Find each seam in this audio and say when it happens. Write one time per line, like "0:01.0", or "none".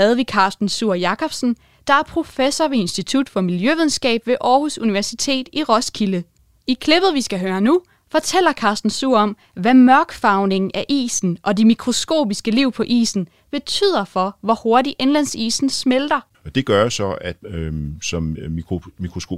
0:16.3
0:17.4